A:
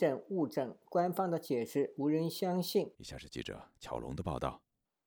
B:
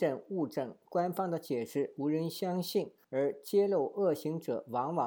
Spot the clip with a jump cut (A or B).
A